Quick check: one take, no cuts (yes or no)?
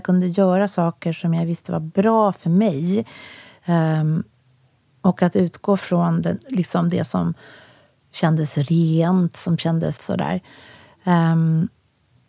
no